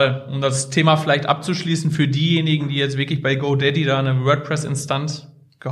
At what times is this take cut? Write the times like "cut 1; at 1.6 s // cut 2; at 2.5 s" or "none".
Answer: none